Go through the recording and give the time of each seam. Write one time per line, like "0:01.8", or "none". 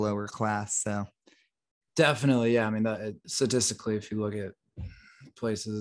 0:01.9
0:03.2